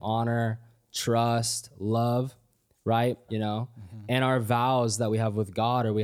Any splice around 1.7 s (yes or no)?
no